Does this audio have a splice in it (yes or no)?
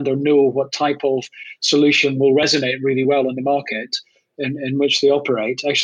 no